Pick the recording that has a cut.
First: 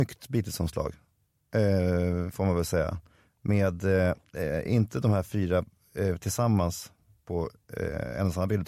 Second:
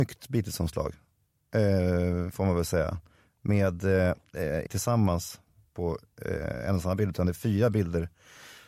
second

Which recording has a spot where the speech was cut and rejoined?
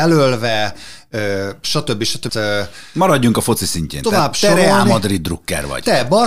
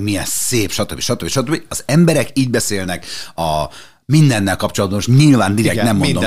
first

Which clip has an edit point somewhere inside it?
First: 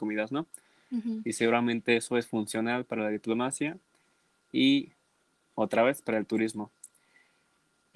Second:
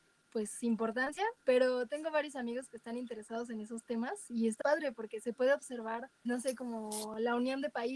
second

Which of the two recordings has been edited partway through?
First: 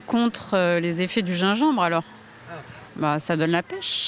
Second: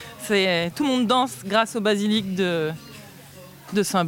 first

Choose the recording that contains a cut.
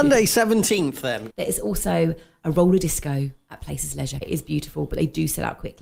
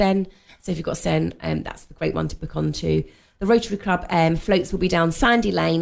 first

